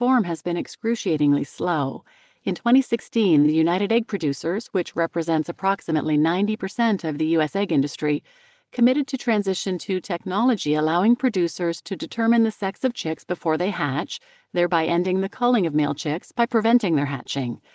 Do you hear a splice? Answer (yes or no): no